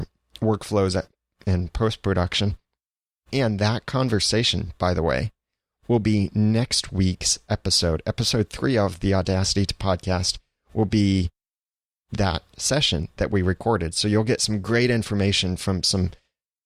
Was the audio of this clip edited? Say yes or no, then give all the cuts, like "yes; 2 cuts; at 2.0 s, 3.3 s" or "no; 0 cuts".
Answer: no; 0 cuts